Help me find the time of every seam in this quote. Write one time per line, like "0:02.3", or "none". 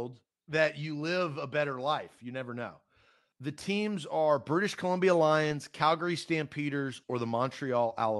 0:03.3
0:07.0